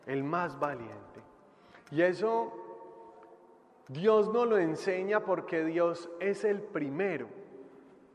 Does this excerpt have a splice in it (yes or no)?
no